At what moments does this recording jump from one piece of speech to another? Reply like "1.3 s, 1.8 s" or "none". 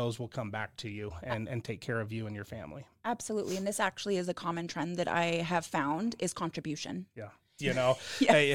7.6 s